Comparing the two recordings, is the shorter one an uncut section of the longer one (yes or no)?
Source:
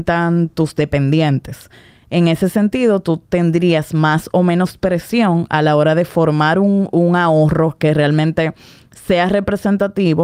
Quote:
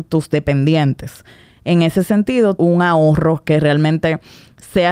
no